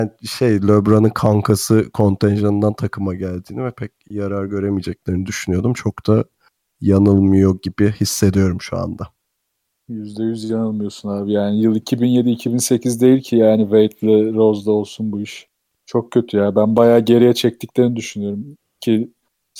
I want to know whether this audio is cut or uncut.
uncut